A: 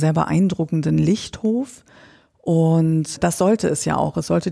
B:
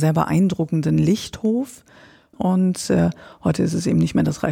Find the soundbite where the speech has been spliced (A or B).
B